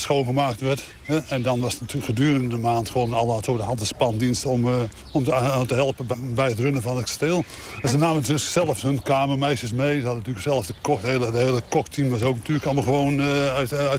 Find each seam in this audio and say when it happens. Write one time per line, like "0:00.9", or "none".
none